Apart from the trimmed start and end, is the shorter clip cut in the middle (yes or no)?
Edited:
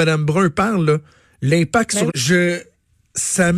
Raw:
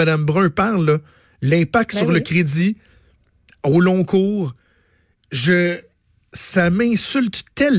yes